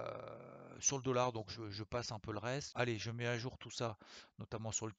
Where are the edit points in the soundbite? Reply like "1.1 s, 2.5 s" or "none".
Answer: 2.7 s